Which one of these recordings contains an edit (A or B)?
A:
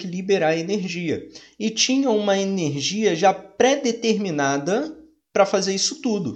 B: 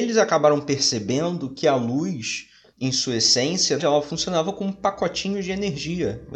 B